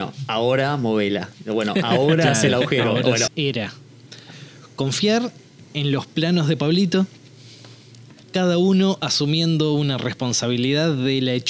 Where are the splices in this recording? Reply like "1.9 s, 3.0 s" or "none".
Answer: 3.3 s, 8.2 s